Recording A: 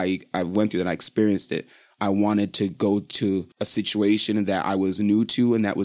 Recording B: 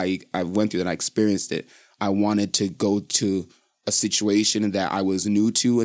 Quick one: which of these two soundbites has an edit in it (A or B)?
A